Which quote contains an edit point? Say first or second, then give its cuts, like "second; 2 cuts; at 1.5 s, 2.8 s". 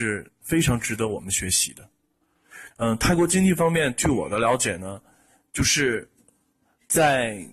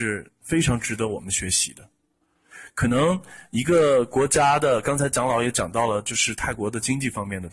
first; 1 cut; at 2.7 s